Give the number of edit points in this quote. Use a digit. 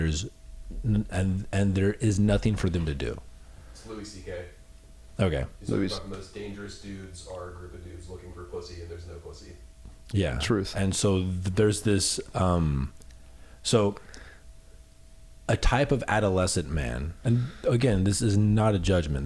0